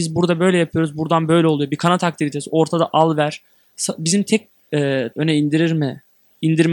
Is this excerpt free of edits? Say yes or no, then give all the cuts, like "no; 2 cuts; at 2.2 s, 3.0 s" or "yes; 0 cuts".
no; 1 cut; at 5.1 s